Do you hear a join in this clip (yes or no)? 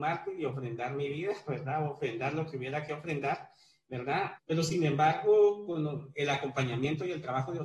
yes